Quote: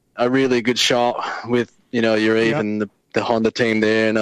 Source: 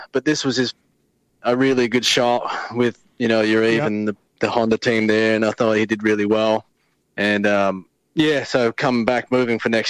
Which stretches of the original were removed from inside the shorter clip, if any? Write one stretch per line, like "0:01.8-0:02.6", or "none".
none